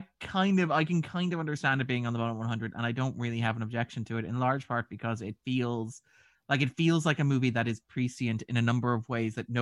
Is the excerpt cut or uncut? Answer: uncut